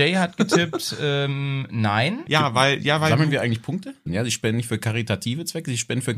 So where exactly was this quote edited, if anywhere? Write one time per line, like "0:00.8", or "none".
0:02.3
0:04.1